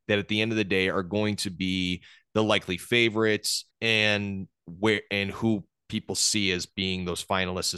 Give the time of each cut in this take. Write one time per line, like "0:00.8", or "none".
0:03.7